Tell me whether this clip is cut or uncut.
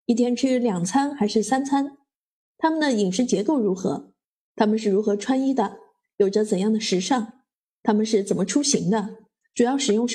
uncut